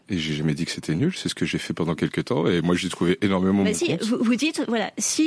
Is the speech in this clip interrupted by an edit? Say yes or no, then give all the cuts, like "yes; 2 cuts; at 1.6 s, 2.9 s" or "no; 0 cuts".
no; 0 cuts